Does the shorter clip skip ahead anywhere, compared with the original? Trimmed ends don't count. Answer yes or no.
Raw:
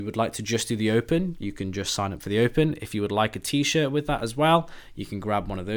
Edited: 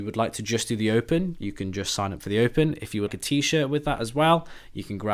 yes